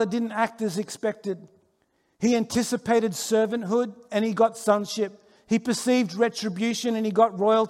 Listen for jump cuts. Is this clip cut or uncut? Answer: uncut